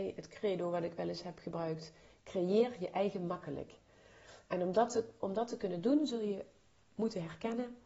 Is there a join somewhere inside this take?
no; 0 cuts

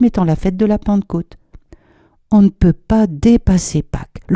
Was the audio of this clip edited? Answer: no; 0 cuts

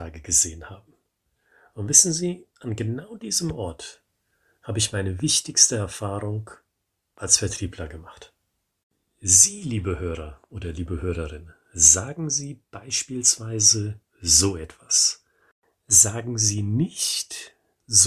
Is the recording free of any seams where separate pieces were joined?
yes; 0 cuts

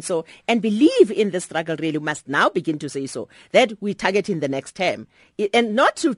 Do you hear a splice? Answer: no; 0 cuts

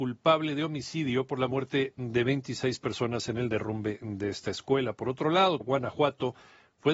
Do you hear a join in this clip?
yes; 1 cut; at 5.6 s

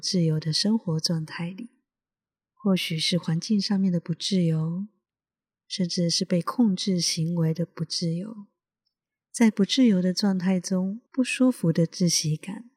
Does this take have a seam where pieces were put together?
yes; 2 cuts; at 5.5 s, 11.1 s

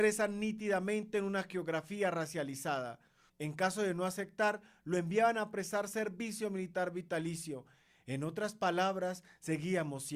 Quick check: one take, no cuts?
no; 1 cut; at 3.3 s

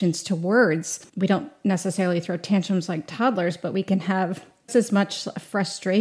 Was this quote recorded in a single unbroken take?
no; 2 cuts; at 1.1 s, 4.7 s

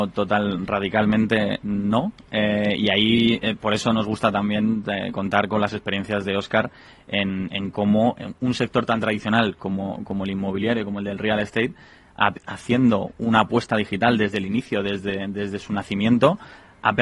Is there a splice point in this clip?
no; 0 cuts

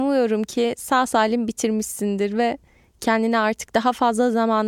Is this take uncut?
yes; 0 cuts

